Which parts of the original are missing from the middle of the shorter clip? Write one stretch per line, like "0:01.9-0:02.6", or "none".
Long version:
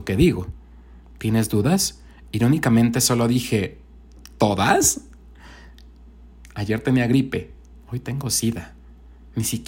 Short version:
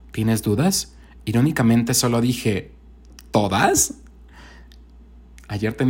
none